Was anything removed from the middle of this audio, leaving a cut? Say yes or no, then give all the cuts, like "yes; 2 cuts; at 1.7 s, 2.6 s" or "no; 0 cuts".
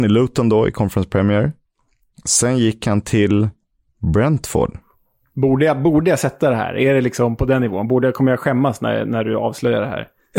no; 0 cuts